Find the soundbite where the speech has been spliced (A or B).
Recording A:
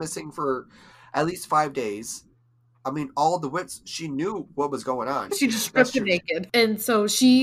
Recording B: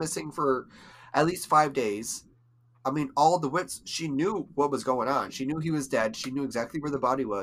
A